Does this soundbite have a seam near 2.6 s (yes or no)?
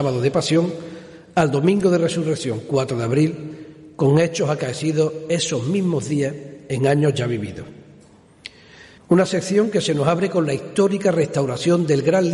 no